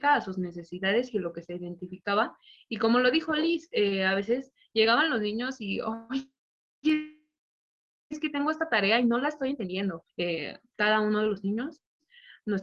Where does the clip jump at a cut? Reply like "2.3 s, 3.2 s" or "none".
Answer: 10.1 s